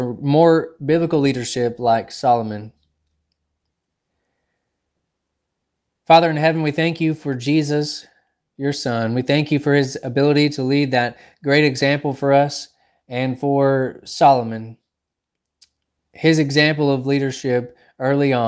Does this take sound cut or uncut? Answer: uncut